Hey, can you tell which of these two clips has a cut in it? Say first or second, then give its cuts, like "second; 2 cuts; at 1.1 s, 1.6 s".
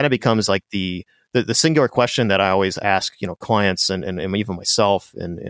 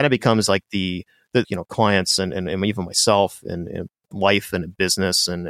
second; 1 cut; at 1.4 s